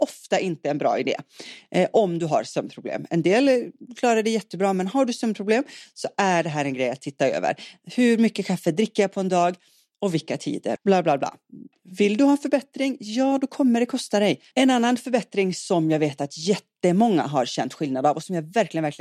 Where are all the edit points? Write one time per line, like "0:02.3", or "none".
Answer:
0:10.8
0:14.5